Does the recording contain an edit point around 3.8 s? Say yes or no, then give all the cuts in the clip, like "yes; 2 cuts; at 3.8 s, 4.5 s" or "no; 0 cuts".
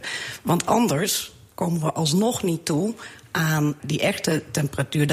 yes; 1 cut; at 3.8 s